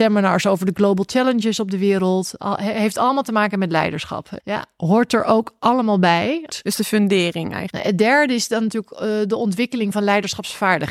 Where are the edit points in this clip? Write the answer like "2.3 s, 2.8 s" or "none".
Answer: 4.4 s, 6.5 s, 7.7 s